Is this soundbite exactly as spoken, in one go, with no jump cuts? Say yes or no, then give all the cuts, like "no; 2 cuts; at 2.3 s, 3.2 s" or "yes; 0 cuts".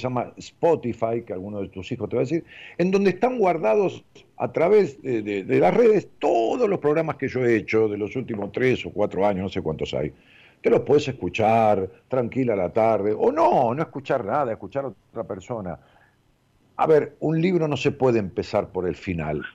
no; 2 cuts; at 5.4 s, 16.6 s